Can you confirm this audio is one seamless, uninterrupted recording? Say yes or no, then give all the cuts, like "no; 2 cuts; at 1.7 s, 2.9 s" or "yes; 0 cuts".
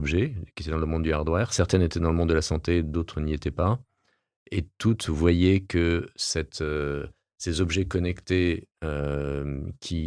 yes; 0 cuts